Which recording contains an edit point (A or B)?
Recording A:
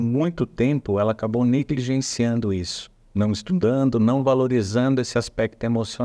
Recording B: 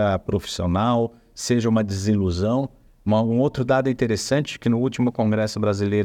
B